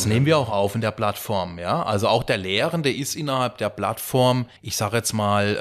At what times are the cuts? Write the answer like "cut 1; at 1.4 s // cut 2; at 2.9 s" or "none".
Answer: cut 1; at 4.6 s